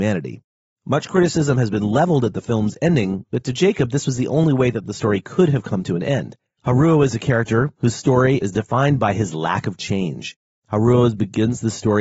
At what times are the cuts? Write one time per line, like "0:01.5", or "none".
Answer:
0:08.4